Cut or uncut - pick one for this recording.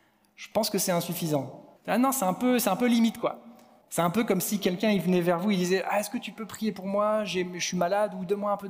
cut